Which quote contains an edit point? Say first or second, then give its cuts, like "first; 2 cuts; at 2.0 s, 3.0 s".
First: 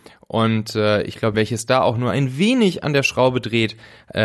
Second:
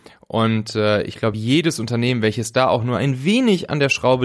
first; 1 cut; at 1.3 s